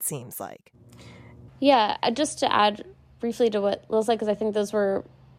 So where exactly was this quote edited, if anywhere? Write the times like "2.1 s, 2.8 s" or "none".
1.5 s